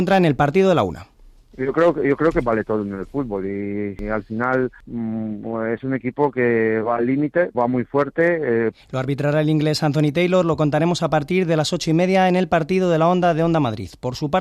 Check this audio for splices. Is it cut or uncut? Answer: cut